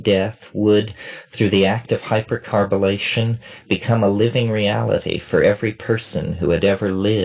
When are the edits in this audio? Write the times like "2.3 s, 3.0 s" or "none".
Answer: none